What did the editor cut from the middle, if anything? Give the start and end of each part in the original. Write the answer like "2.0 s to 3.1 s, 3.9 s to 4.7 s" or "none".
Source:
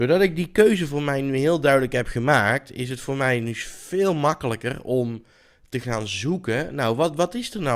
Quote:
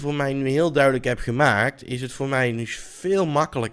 none